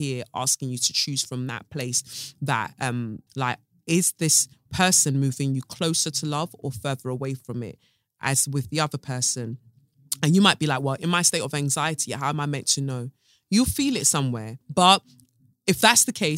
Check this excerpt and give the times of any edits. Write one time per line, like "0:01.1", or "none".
0:03.3
0:14.6